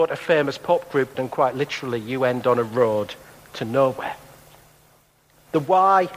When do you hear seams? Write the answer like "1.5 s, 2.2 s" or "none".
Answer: 1.1 s